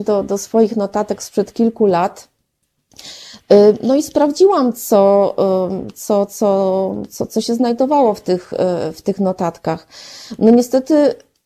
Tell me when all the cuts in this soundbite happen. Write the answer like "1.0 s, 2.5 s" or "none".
none